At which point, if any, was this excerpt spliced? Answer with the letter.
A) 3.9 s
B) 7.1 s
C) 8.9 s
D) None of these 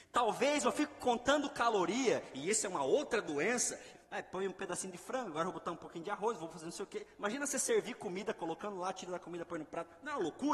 A